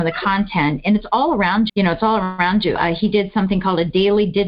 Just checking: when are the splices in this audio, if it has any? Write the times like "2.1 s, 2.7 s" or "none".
1.7 s, 2.8 s